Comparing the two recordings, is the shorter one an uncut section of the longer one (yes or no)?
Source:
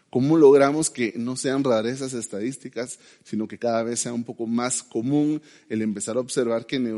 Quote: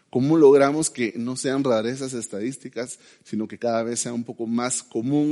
yes